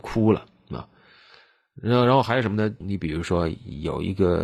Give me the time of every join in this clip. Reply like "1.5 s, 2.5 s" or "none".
2.8 s